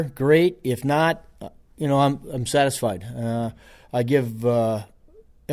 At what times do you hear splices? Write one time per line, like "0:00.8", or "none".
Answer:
none